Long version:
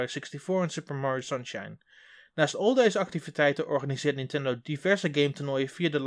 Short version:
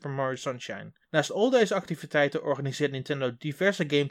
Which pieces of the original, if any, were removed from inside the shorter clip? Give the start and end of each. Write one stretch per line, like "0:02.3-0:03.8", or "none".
0:01.9-0:02.3